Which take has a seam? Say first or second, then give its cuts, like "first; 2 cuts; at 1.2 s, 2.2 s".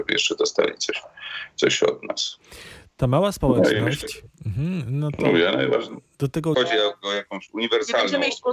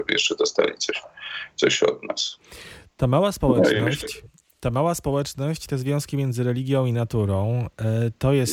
first; 2 cuts; at 4.4 s, 6.5 s